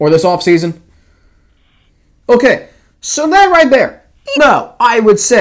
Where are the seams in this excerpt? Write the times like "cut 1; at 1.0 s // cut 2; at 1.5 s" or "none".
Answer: cut 1; at 2.2 s // cut 2; at 4.4 s